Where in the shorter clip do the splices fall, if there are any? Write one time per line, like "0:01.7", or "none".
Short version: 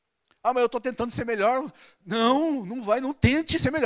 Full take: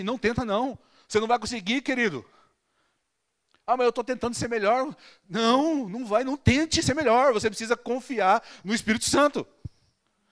none